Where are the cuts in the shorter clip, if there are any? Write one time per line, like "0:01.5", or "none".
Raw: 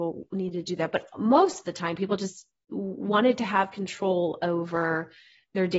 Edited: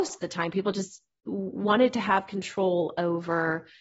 none